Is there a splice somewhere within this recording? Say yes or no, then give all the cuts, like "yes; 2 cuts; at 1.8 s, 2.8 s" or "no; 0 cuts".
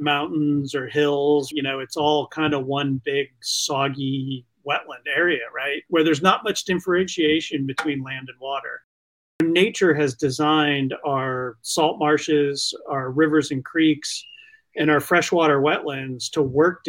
yes; 1 cut; at 1.5 s